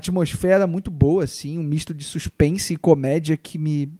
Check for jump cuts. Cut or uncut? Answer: uncut